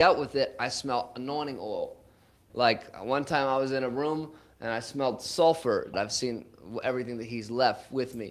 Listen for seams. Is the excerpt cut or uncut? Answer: cut